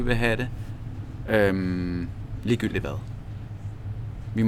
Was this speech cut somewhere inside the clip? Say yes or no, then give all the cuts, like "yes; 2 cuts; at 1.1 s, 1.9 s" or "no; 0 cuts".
no; 0 cuts